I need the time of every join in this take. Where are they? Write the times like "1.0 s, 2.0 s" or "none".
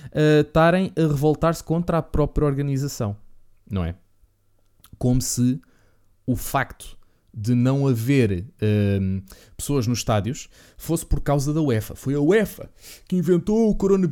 none